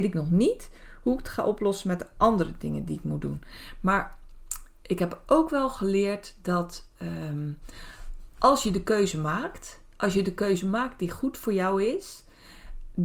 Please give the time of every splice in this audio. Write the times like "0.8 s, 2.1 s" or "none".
none

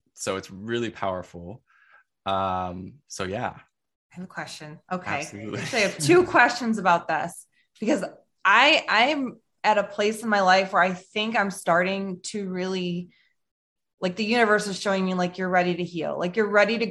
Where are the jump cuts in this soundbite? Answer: none

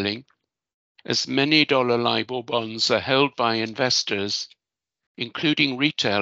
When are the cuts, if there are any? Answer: 1.0 s

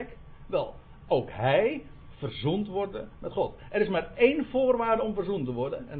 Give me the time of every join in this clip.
1.1 s

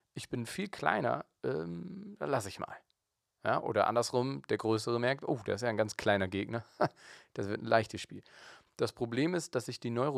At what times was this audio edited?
8.7 s

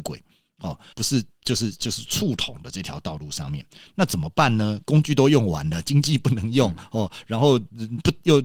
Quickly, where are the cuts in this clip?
0.9 s

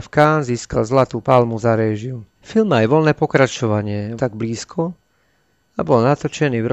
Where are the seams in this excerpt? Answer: 2.4 s, 4.2 s

